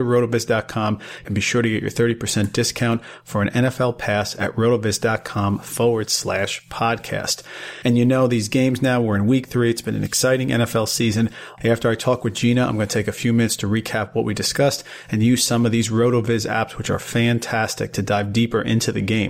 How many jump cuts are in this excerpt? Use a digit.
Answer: 2